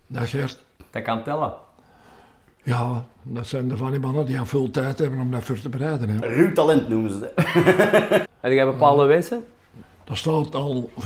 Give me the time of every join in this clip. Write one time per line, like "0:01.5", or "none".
0:06.2
0:08.2
0:09.8